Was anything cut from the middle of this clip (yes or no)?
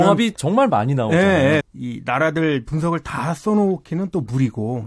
yes